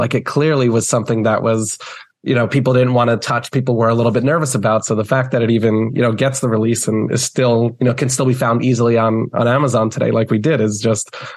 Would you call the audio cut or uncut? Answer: uncut